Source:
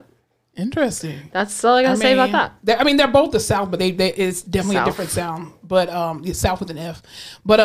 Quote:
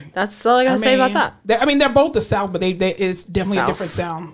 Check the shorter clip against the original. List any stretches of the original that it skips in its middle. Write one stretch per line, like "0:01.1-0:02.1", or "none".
none